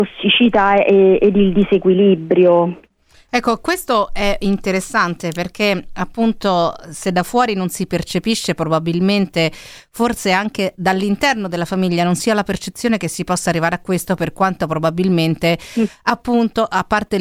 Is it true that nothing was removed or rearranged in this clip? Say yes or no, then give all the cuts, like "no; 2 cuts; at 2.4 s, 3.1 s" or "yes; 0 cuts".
yes; 0 cuts